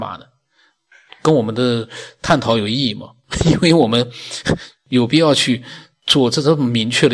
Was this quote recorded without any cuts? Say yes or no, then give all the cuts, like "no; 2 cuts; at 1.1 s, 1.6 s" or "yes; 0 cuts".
yes; 0 cuts